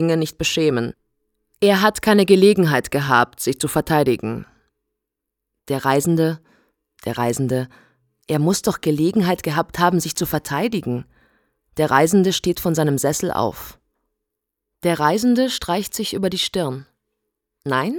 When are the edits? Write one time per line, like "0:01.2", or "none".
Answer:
0:07.0